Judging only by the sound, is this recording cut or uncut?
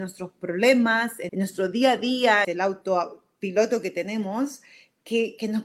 cut